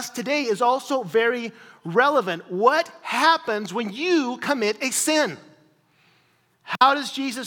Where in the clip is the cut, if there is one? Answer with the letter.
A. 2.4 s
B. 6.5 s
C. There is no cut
B